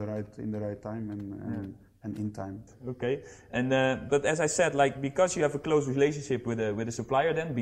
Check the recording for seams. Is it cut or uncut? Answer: cut